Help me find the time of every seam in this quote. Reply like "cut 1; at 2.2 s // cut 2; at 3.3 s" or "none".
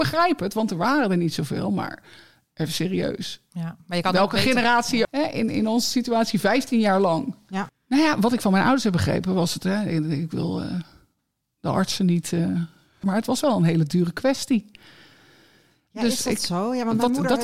cut 1; at 5.0 s // cut 2; at 7.7 s // cut 3; at 13.0 s